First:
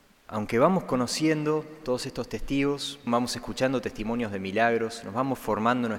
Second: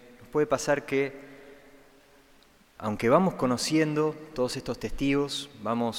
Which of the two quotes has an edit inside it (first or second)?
first